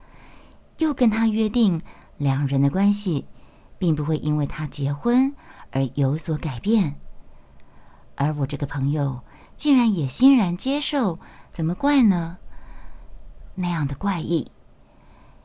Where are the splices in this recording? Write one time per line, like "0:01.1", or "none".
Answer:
0:11.5
0:13.5